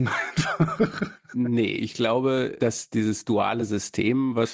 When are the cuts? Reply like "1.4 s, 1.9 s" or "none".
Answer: none